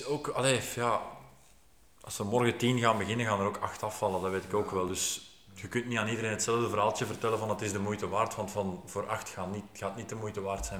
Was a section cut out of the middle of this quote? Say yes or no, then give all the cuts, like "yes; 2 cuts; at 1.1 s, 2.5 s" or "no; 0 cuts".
no; 0 cuts